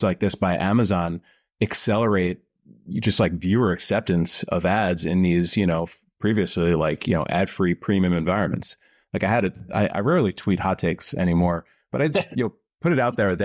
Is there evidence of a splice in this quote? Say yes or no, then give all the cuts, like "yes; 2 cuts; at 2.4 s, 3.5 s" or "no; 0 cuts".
no; 0 cuts